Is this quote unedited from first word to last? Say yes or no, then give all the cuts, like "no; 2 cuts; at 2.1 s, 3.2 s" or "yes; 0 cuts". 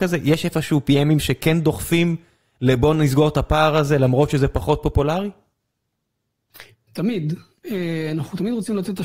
yes; 0 cuts